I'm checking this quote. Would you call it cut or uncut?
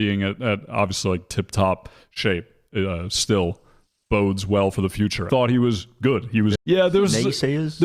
cut